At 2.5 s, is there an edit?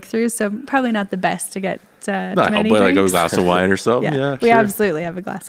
yes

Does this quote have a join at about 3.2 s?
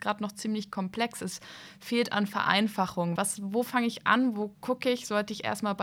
yes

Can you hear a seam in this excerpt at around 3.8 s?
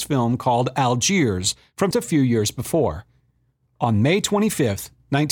no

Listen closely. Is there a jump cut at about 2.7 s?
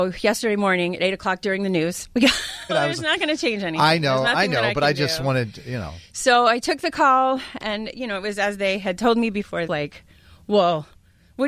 yes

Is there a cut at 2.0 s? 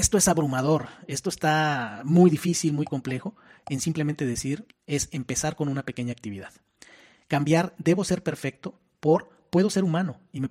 no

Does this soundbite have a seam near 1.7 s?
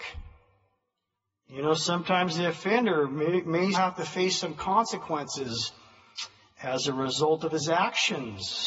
no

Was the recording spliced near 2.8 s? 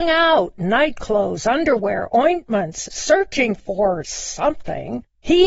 yes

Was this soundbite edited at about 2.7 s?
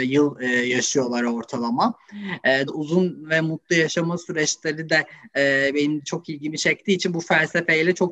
yes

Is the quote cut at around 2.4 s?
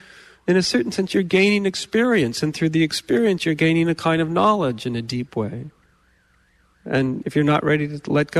no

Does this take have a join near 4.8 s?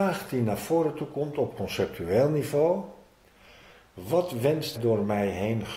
yes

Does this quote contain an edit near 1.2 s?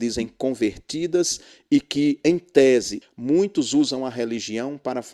no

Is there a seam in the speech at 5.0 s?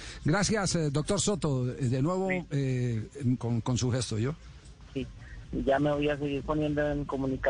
yes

